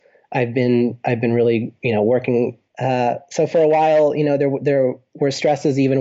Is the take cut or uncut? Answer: cut